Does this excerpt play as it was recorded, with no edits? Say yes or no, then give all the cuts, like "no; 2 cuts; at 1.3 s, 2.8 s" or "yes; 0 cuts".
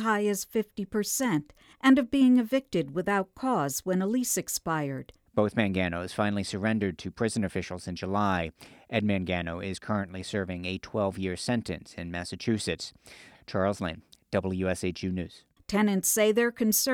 no; 2 cuts; at 5.3 s, 15.6 s